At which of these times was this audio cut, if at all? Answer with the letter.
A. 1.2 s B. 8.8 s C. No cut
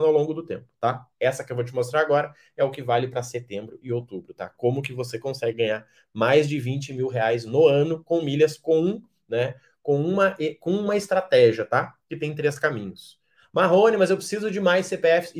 A